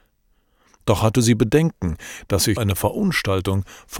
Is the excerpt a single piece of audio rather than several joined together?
no; 1 cut; at 2.6 s

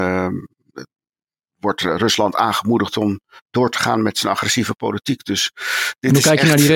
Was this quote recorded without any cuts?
yes; 0 cuts

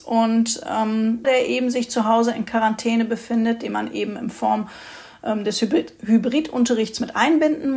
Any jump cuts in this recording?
yes; 1 cut; at 1.2 s

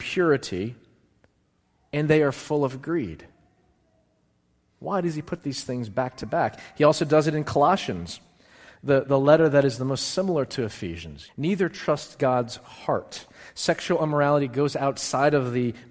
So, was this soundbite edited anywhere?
yes; 1 cut; at 11.3 s

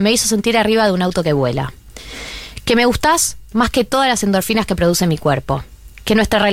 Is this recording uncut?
yes; 0 cuts

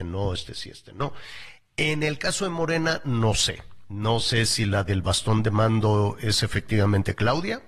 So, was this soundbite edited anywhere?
no; 0 cuts

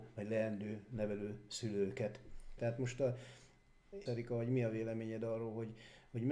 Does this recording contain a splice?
yes; 2 cuts; at 2.6 s, 4.1 s

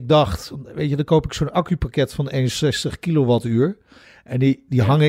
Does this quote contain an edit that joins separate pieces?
no; 0 cuts

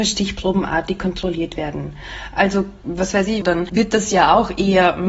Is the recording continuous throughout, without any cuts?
no; 1 cut; at 3.4 s

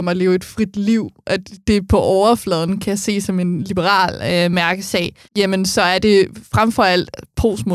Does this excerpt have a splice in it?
yes; 1 cut; at 5.2 s

